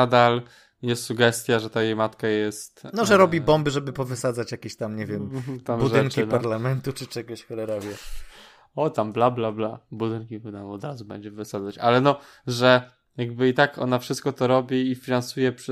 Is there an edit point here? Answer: no; 0 cuts

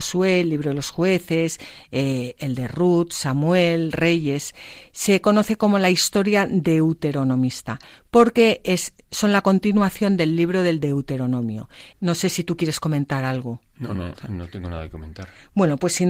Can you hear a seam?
yes; 1 cut; at 11.9 s

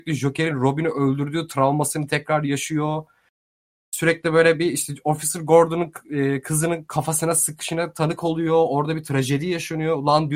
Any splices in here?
yes; 1 cut; at 2.1 s

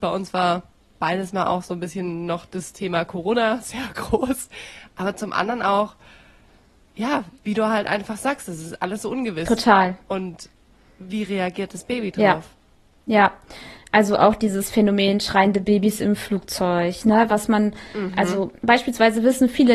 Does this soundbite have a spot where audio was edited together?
no; 0 cuts

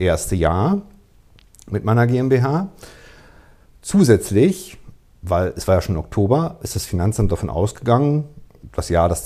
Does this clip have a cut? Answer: no; 0 cuts

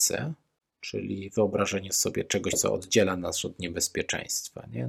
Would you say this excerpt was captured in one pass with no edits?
yes; 0 cuts

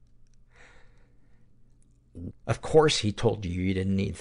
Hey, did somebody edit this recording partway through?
yes; 1 cut; at 2.3 s

